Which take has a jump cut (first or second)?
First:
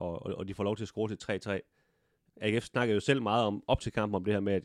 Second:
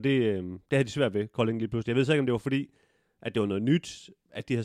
first